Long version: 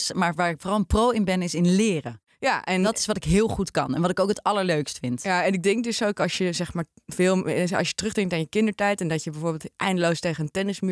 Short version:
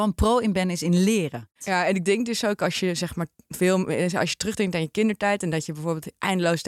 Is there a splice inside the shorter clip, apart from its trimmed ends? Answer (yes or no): yes